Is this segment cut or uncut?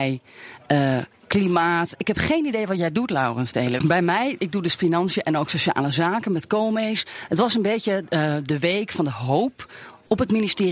cut